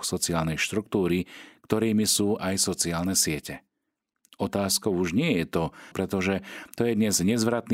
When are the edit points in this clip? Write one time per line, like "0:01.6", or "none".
0:05.9